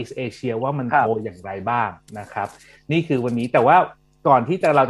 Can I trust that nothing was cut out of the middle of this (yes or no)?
yes